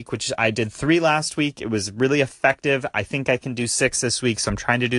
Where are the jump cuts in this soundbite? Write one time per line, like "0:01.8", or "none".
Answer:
none